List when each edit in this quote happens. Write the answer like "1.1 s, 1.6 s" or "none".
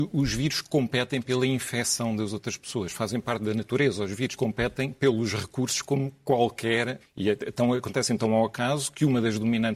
4.4 s, 7.0 s